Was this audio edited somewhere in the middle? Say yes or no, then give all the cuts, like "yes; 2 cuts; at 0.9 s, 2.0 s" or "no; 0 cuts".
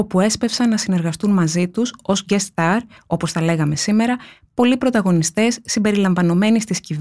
no; 0 cuts